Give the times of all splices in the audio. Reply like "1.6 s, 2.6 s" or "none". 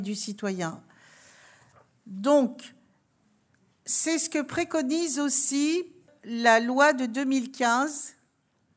none